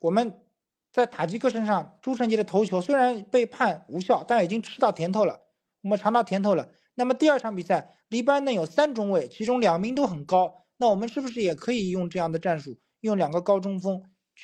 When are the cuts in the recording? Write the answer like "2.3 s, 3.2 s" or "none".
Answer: none